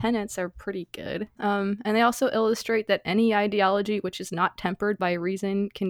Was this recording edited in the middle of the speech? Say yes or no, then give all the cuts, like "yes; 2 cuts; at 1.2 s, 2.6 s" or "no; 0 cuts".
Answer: yes; 1 cut; at 1.4 s